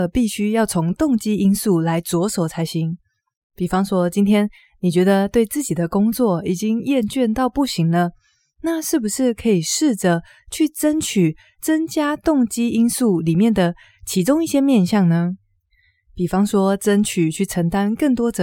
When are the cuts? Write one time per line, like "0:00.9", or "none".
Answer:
none